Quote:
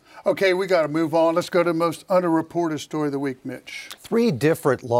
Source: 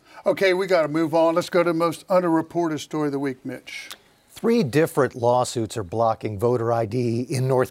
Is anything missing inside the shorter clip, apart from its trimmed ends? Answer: yes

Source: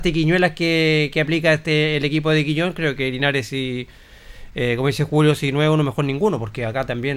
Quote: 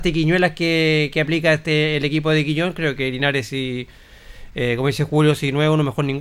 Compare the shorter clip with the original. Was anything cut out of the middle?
no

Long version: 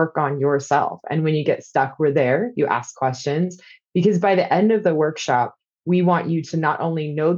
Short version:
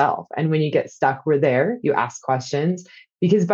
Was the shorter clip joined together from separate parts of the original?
no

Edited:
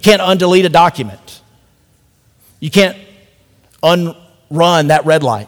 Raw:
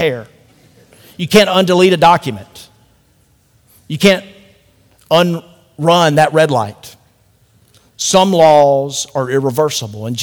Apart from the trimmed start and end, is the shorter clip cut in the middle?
no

